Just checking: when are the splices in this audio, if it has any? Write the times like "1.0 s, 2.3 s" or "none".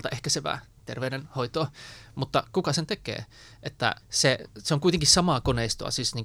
4.0 s